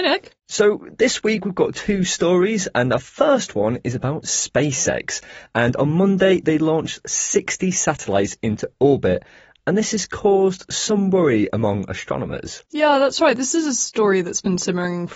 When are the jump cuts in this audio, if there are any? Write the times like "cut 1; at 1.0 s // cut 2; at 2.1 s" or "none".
none